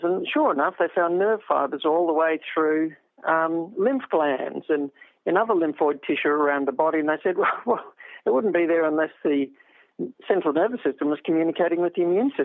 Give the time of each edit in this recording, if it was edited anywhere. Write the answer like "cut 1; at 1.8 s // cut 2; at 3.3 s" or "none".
none